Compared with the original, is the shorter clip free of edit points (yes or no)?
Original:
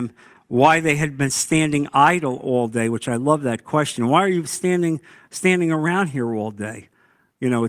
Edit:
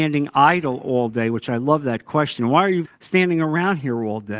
no